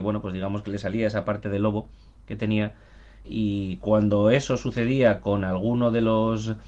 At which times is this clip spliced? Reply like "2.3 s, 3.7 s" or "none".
3.2 s